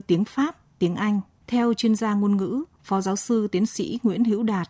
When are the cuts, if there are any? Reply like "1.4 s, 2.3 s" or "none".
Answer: 1.4 s